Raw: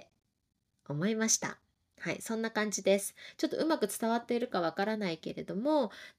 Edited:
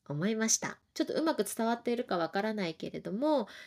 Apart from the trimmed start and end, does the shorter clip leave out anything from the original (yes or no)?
yes